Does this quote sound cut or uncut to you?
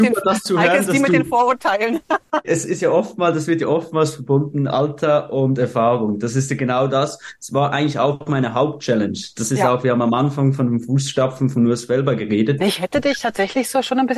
cut